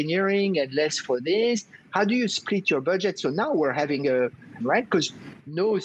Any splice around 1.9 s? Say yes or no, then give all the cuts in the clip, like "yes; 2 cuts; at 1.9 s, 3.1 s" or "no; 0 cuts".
no; 1 cut; at 4.6 s